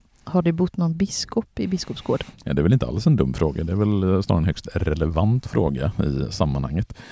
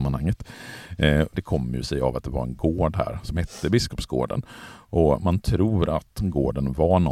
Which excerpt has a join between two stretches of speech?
second; 1 cut; at 1.3 s

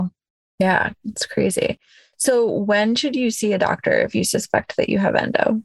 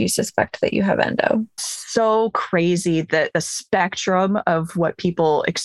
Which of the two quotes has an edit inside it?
second; 1 cut; at 1.6 s

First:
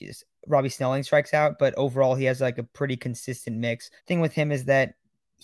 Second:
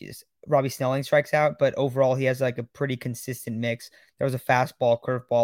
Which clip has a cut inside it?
first; 1 cut; at 4.0 s

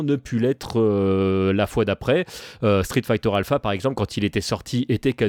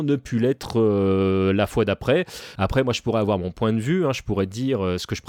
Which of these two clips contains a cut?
second; 1 cut; at 2.6 s

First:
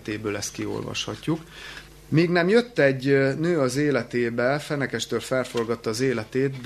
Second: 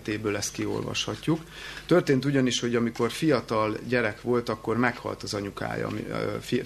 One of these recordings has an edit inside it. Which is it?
first; 1 cut; at 1.9 s

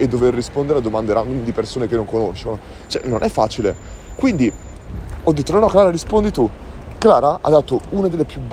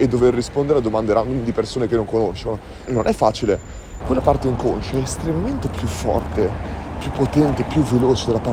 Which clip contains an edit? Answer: second; 2 cuts; at 2.9 s, 4.0 s

